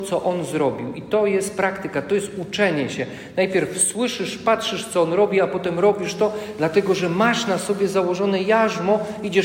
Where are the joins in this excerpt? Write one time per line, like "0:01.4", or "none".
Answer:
none